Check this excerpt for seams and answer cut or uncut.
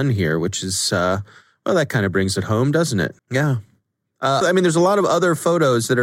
cut